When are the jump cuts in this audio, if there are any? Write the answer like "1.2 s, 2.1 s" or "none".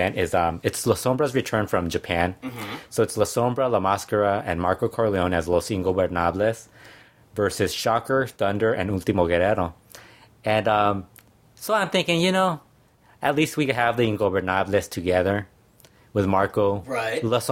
none